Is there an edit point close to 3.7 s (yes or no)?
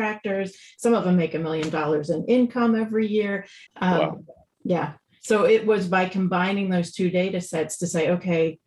yes